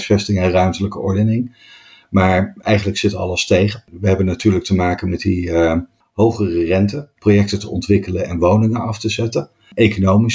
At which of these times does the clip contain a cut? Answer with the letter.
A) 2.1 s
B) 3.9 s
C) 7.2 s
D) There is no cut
C